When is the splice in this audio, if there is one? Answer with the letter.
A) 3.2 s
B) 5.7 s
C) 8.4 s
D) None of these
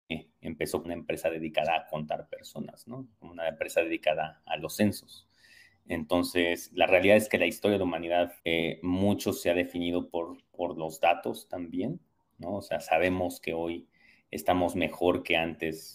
C